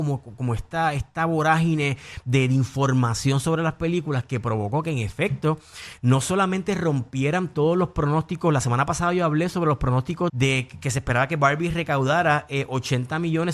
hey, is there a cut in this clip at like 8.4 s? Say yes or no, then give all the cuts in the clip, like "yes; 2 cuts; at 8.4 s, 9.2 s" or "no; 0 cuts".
no; 1 cut; at 10.3 s